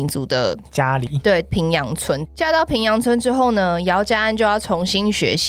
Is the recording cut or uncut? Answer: uncut